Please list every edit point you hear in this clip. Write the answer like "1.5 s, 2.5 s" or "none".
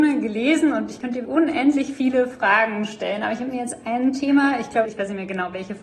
1.2 s, 4.8 s